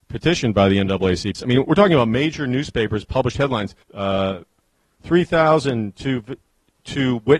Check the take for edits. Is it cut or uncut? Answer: cut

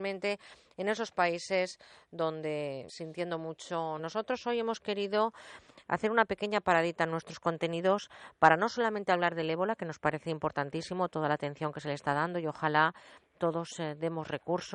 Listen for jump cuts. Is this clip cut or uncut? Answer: cut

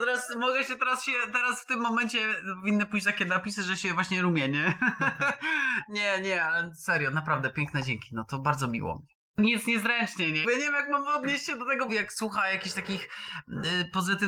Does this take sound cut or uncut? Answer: cut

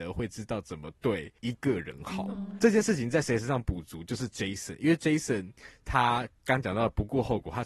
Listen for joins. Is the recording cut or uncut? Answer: cut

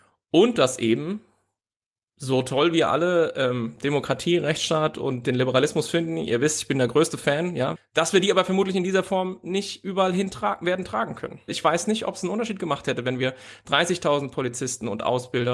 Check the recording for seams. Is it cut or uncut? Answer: cut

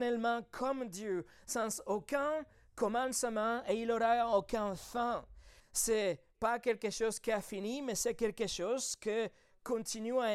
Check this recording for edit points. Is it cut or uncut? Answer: cut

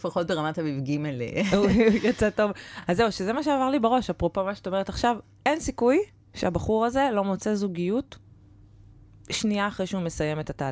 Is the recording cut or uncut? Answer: uncut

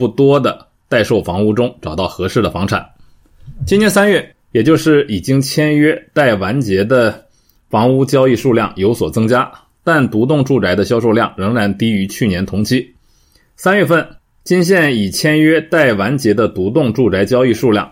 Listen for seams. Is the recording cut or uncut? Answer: cut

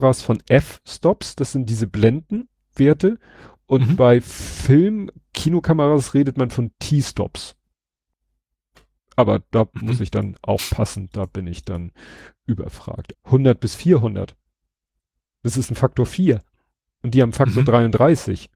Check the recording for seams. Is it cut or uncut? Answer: cut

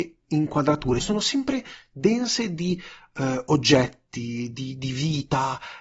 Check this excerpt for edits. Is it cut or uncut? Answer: cut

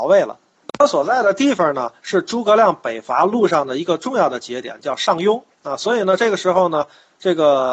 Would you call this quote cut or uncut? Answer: uncut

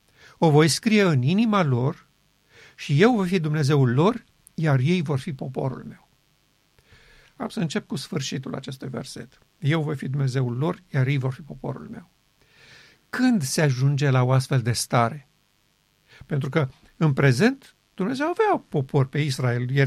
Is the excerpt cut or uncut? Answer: uncut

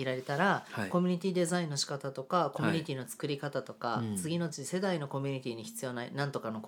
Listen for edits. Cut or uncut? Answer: uncut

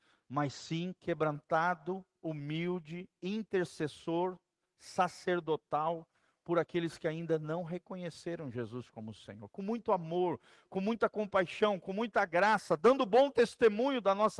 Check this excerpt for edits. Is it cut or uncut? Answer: uncut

